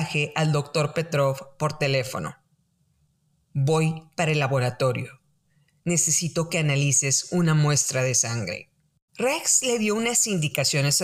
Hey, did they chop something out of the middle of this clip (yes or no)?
yes